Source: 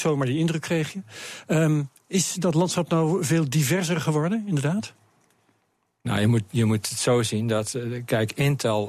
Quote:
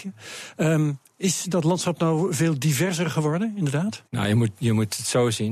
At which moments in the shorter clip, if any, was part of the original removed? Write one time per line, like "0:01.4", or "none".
0:04.1